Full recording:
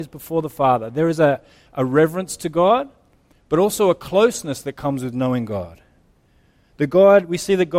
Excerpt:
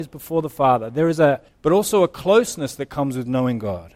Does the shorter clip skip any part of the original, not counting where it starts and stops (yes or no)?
yes